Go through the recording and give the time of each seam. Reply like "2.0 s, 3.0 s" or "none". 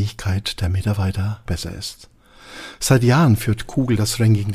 1.5 s